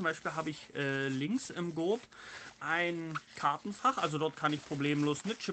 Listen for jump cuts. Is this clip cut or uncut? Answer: uncut